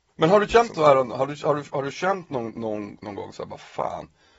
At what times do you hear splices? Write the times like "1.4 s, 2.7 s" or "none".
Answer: none